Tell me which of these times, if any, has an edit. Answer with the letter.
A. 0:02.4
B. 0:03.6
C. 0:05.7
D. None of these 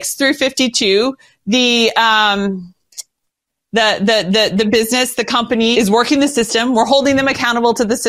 C